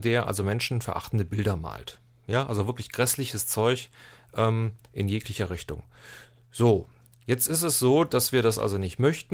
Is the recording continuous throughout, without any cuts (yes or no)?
yes